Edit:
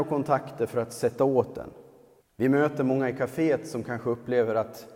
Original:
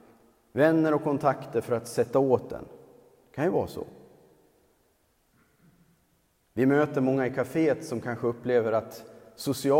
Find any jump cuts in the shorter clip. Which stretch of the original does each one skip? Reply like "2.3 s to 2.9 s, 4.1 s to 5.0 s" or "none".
3.2 s to 6.4 s